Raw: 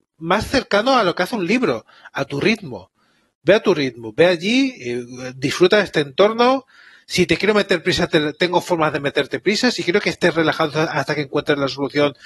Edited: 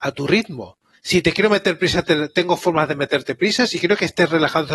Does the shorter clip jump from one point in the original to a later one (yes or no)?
yes